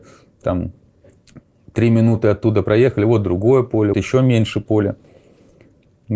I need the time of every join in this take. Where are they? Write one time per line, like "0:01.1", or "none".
0:03.9